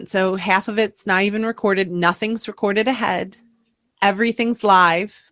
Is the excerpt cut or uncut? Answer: uncut